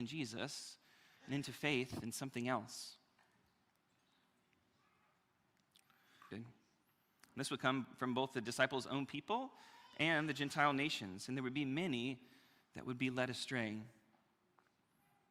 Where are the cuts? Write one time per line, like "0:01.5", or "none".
0:06.3